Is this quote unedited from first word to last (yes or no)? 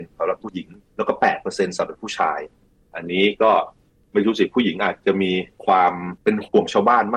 yes